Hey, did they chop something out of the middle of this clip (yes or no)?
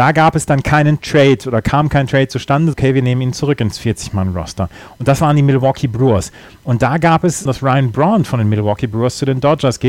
yes